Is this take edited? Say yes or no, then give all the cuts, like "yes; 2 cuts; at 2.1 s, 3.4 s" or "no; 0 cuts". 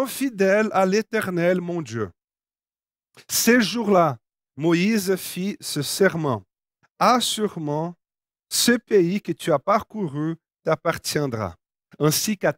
no; 0 cuts